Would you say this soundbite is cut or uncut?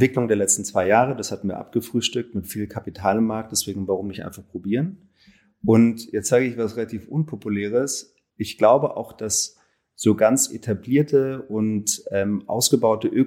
uncut